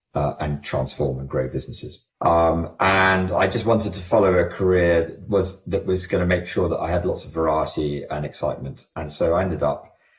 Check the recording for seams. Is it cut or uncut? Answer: cut